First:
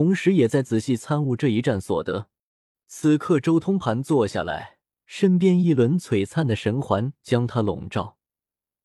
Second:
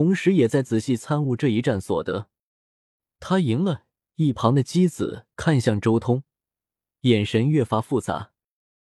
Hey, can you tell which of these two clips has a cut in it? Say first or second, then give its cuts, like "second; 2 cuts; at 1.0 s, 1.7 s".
first; 2 cuts; at 2.7 s, 5.0 s